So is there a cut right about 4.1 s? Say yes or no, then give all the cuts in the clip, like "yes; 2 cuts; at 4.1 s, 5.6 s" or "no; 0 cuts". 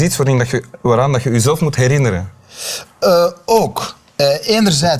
no; 0 cuts